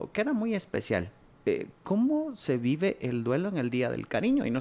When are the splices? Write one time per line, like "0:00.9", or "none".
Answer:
none